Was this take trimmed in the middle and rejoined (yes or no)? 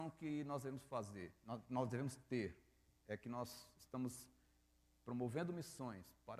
no